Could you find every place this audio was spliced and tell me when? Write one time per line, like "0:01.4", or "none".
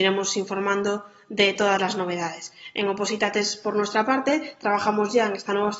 none